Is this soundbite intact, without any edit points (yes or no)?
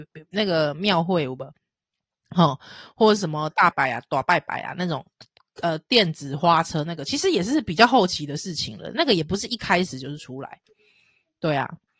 no